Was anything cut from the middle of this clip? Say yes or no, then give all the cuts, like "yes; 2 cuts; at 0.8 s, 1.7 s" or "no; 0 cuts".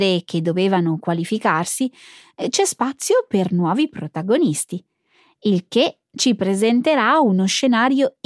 no; 0 cuts